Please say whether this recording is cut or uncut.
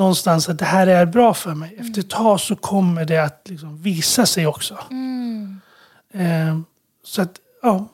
uncut